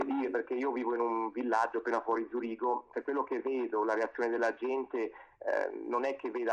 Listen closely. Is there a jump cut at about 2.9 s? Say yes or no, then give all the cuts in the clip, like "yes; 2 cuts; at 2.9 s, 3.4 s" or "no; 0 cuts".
yes; 1 cut; at 2.9 s